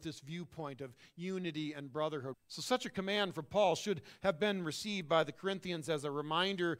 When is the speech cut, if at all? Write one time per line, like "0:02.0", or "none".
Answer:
0:02.3